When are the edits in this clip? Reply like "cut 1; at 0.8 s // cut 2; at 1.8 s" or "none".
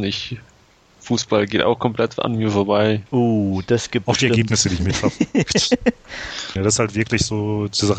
cut 1; at 3.1 s // cut 2; at 6.6 s